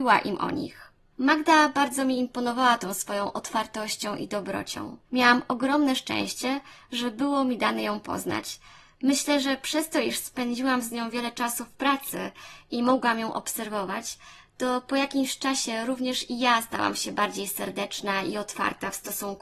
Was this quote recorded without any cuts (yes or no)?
no